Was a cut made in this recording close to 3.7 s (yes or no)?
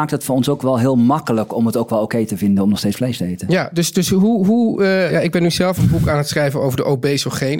no